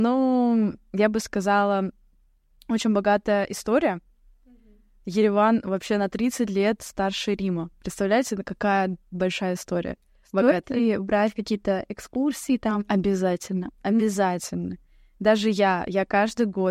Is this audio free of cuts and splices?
yes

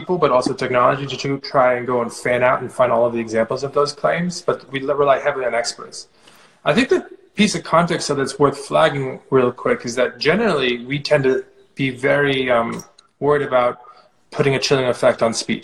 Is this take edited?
no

